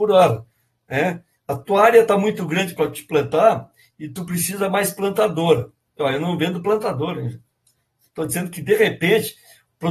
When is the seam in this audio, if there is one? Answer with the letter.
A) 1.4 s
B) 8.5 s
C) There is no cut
A